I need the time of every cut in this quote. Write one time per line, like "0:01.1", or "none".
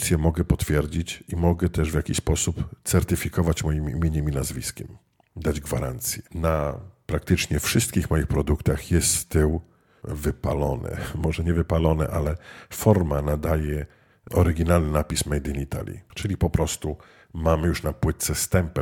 0:06.3